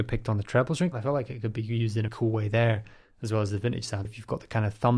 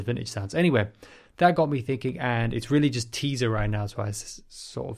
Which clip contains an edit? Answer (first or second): first